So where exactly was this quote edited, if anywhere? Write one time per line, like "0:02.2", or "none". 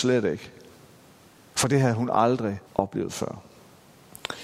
0:02.7